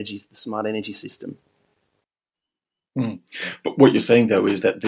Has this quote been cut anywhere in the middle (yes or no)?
no